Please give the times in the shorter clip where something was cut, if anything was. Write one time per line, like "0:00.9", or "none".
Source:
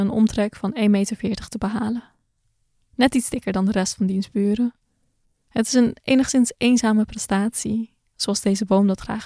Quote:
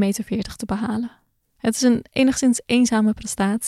0:01.4